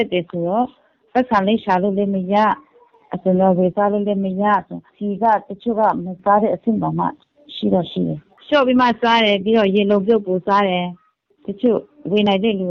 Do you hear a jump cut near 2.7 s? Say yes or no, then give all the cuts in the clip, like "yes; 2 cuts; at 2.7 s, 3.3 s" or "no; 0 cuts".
no; 1 cut; at 4.9 s